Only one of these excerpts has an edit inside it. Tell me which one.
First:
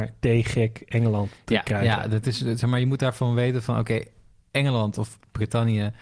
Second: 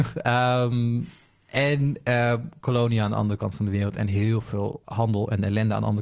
second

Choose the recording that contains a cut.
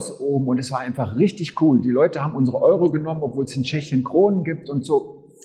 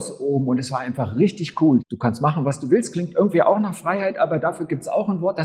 second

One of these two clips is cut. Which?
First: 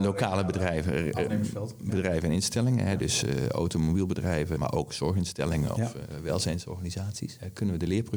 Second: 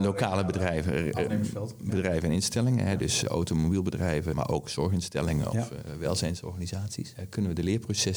second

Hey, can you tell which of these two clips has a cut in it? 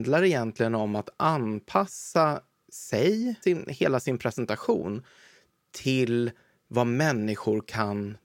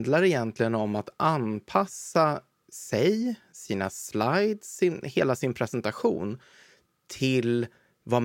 first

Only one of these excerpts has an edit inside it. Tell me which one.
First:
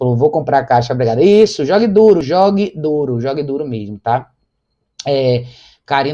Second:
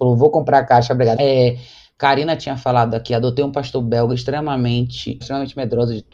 second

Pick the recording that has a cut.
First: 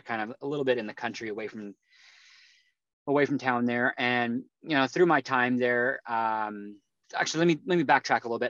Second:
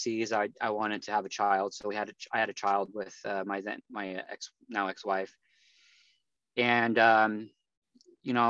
first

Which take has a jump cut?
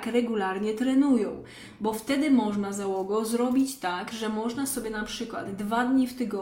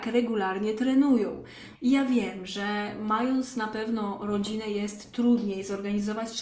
second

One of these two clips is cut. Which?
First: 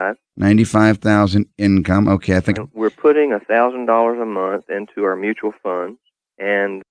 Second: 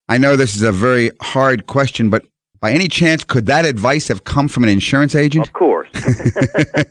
first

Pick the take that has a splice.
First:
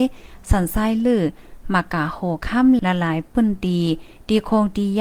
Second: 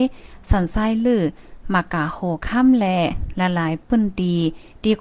first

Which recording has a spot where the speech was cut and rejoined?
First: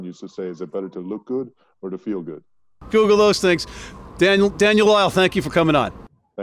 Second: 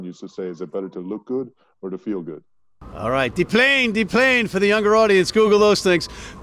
first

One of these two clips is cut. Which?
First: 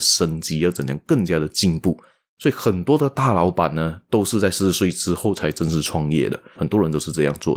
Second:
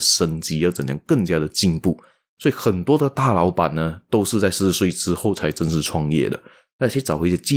first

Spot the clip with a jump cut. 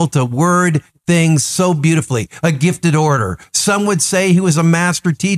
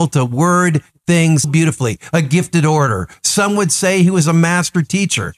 second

